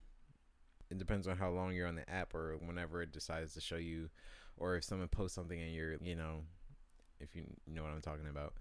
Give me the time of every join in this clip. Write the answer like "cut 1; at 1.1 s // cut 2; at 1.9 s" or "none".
cut 1; at 2.6 s // cut 2; at 6.0 s // cut 3; at 7.2 s